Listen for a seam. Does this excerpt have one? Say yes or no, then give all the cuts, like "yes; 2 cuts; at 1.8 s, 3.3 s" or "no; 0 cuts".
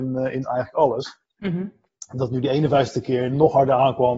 yes; 1 cut; at 1.3 s